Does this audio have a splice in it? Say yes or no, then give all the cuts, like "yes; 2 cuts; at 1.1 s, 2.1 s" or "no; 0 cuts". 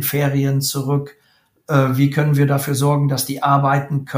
no; 0 cuts